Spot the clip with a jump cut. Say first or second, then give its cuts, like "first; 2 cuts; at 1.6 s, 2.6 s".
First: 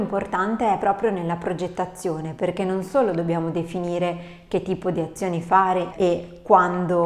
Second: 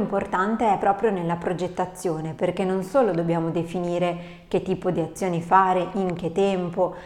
first; 1 cut; at 5.9 s